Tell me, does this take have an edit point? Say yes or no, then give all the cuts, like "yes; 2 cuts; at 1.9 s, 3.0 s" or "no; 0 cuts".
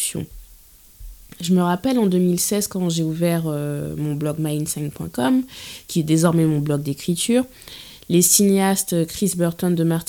no; 0 cuts